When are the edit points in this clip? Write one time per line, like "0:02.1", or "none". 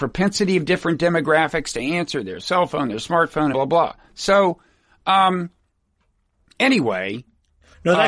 0:03.5